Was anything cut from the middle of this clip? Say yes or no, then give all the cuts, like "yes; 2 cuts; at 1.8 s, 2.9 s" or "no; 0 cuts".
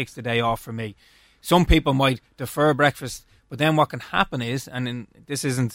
no; 0 cuts